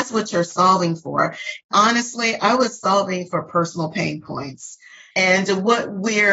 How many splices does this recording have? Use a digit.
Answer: 2